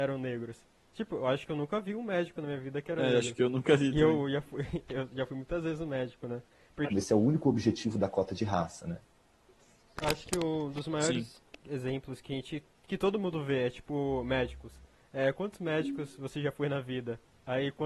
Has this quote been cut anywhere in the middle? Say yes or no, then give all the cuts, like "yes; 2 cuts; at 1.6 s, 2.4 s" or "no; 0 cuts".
yes; 1 cut; at 6.9 s